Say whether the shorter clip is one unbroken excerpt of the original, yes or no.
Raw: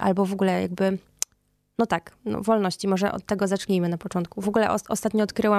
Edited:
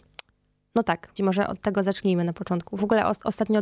no